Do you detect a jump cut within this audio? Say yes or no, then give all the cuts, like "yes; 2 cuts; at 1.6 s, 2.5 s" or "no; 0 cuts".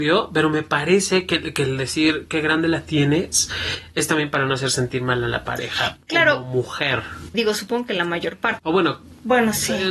yes; 2 cuts; at 7.3 s, 8.6 s